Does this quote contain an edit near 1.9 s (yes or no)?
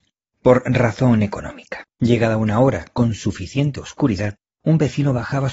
yes